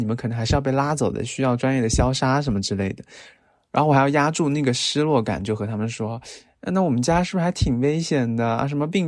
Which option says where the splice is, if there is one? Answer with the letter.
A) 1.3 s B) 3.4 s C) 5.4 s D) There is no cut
B